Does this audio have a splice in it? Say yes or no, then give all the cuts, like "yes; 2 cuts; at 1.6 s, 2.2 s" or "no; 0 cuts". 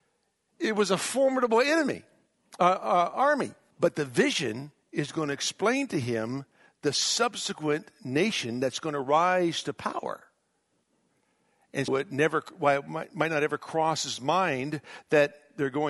yes; 2 cuts; at 3.7 s, 11.9 s